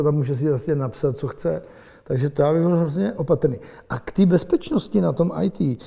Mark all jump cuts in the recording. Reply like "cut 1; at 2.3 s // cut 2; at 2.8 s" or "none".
none